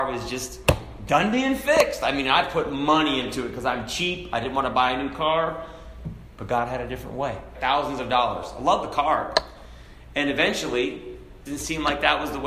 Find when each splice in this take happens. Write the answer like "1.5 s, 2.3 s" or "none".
7.5 s, 11.5 s